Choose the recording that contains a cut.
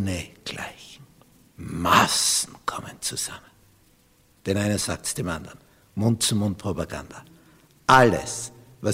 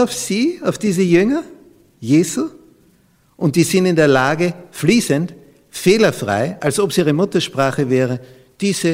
first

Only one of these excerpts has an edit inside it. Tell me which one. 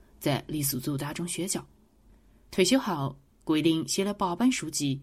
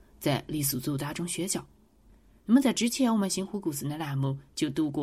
second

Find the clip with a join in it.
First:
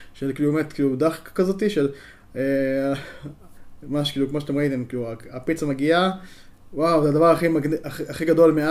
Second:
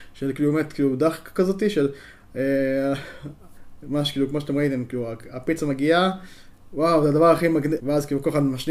second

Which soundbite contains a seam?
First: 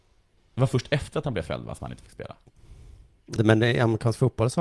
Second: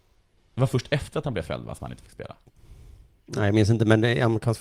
first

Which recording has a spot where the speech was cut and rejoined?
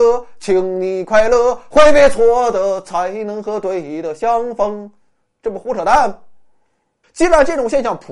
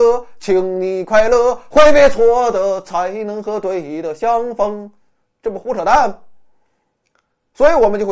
first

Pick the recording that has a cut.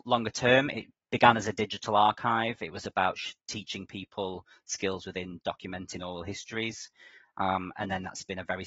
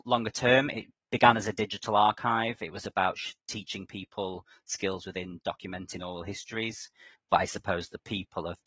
second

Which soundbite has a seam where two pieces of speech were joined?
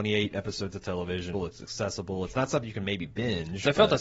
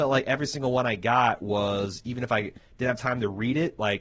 first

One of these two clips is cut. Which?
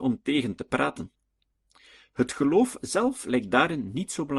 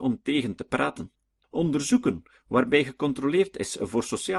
second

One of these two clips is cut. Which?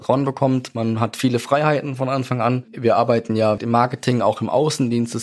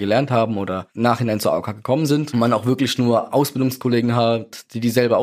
first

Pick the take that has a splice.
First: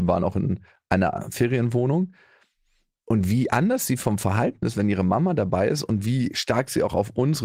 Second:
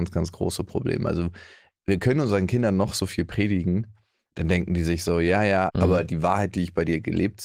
second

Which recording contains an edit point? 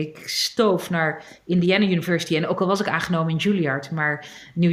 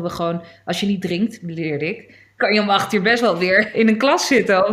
second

